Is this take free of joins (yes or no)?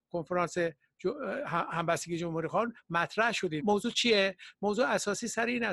no